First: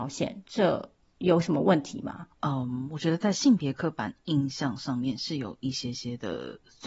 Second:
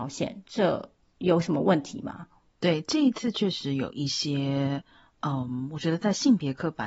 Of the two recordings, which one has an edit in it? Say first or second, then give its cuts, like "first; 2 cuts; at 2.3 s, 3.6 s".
first; 1 cut; at 2.3 s